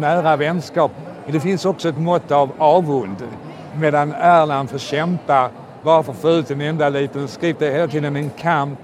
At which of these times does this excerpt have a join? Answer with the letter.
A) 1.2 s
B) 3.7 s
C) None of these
B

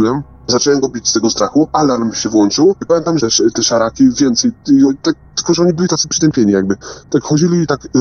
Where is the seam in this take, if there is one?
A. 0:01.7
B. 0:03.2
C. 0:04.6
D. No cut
B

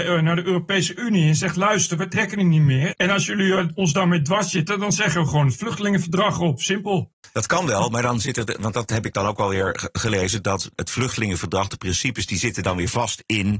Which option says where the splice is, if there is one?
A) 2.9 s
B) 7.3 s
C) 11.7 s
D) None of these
A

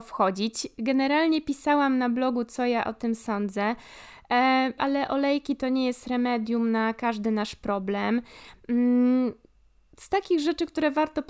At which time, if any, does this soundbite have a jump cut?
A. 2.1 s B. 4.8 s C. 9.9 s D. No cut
B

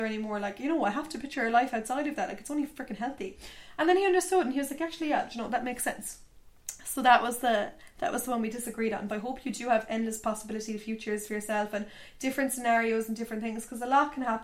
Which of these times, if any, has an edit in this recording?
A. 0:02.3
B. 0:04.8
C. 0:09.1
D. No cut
C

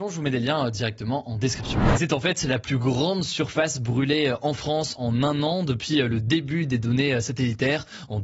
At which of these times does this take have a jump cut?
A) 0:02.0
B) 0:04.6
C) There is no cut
A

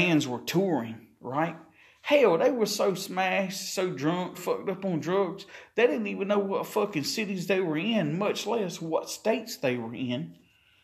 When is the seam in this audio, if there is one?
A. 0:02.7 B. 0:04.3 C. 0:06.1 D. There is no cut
B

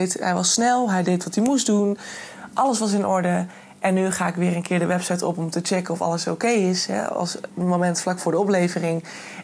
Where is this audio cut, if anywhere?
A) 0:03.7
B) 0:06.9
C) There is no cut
C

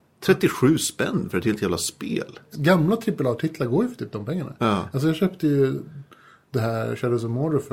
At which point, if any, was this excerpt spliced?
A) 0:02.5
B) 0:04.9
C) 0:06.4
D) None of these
A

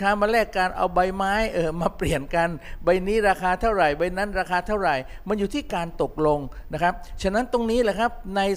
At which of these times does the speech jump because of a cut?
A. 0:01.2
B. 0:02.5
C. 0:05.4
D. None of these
D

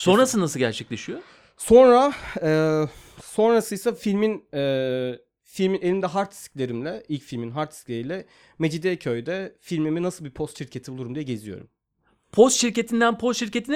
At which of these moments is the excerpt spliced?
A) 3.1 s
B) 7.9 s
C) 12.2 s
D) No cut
D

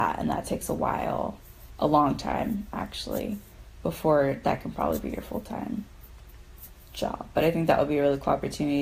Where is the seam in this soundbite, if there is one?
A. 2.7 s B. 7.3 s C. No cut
C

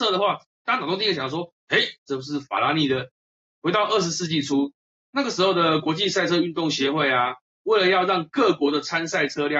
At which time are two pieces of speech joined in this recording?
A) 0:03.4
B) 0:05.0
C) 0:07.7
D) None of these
A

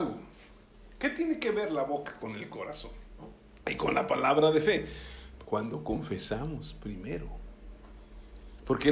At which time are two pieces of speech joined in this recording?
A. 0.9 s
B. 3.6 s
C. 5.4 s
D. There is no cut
C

